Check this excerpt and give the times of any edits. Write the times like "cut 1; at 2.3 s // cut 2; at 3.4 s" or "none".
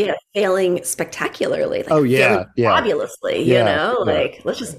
none